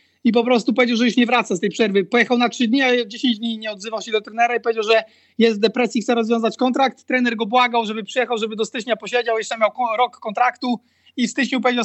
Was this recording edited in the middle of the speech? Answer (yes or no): no